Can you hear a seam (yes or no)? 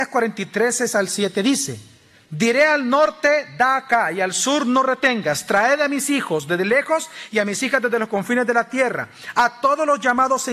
no